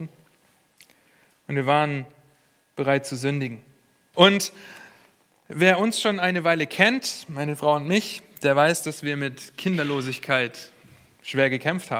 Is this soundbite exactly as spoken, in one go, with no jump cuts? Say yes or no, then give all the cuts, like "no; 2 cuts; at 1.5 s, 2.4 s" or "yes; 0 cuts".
no; 1 cut; at 4.1 s